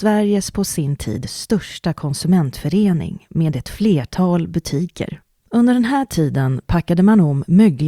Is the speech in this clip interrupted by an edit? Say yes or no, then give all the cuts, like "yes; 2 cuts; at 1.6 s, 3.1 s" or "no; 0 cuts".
yes; 1 cut; at 5.4 s